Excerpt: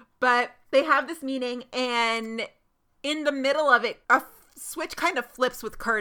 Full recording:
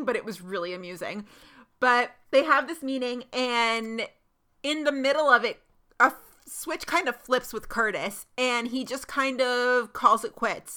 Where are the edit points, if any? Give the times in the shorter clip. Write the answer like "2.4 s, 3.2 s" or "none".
4.0 s